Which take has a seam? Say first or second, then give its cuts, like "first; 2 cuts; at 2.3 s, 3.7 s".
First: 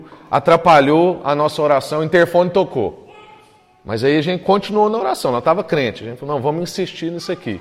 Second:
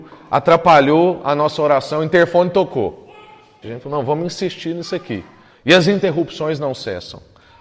second; 2 cuts; at 3.6 s, 5.5 s